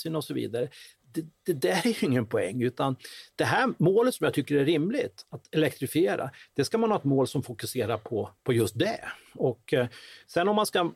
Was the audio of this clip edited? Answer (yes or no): no